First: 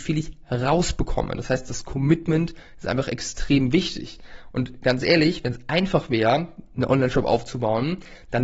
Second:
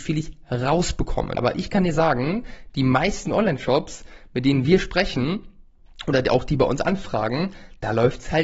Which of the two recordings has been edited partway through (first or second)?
second